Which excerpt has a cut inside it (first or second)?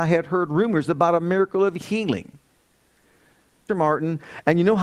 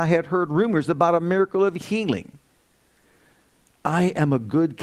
first